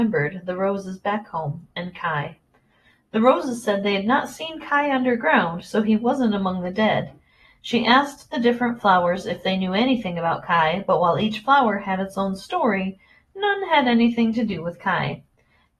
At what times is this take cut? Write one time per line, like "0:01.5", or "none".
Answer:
none